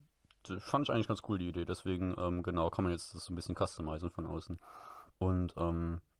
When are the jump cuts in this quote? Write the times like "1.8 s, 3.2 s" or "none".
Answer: 5.1 s